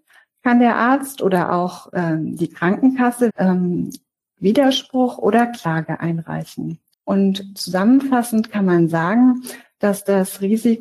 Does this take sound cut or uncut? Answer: cut